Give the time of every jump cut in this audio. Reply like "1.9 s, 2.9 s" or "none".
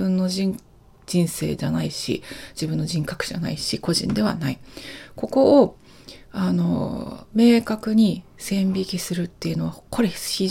none